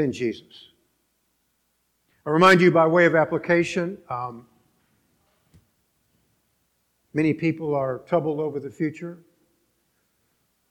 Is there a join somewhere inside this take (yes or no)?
no